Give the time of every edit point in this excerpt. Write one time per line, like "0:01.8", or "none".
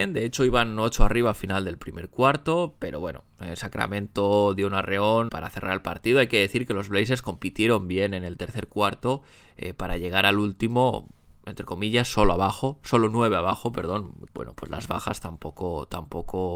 0:05.3
0:14.3